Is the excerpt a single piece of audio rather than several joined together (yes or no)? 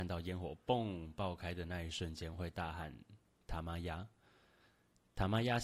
yes